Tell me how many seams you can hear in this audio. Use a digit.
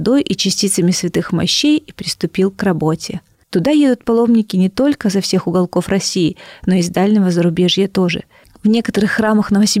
1